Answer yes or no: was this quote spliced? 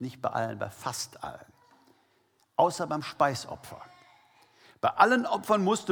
no